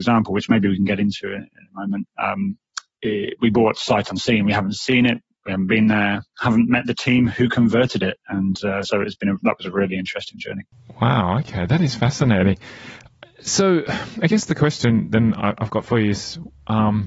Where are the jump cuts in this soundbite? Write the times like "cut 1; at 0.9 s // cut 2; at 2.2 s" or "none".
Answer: none

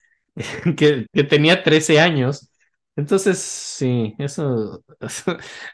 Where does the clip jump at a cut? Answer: cut 1; at 1.1 s

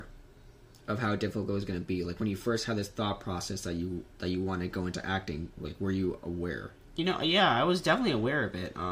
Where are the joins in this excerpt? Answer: none

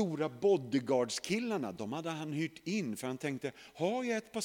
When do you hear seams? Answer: none

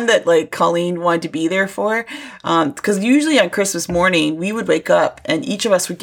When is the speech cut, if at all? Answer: none

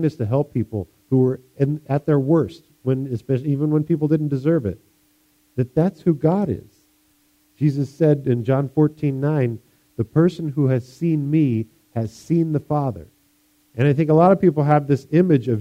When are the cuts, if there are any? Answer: none

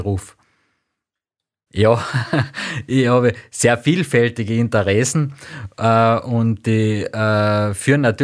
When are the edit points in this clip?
cut 1; at 1.7 s

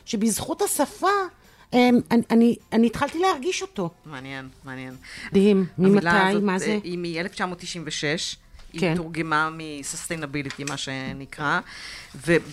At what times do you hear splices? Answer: cut 1; at 5.3 s

